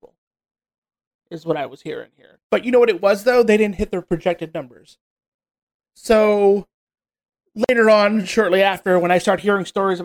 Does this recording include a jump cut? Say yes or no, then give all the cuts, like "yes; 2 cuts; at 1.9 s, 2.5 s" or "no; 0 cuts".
yes; 2 cuts; at 2.4 s, 5.8 s